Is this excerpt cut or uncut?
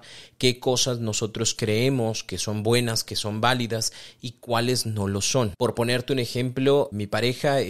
uncut